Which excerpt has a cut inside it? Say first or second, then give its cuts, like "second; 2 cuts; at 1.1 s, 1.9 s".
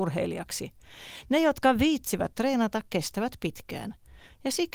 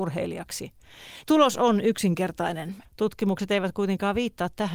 second; 2 cuts; at 1.2 s, 2.8 s